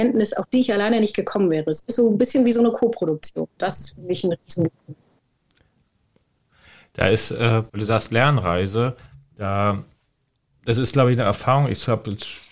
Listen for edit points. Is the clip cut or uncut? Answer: cut